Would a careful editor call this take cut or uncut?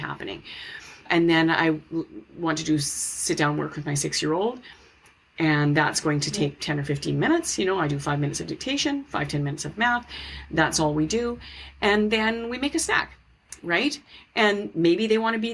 uncut